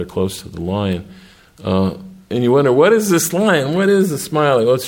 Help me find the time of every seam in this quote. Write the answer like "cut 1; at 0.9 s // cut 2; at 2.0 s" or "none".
none